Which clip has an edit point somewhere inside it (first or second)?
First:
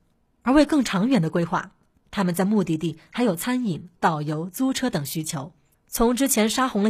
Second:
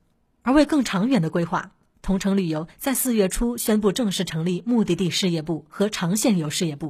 first